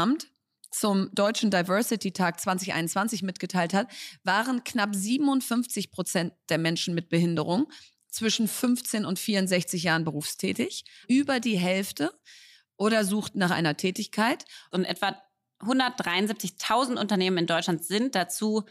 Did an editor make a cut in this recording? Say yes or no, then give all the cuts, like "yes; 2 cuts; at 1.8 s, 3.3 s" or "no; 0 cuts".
yes; 2 cuts; at 11.0 s, 14.7 s